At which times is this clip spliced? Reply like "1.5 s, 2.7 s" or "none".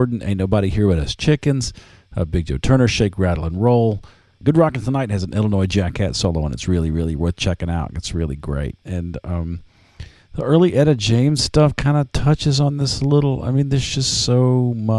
4.4 s, 8.8 s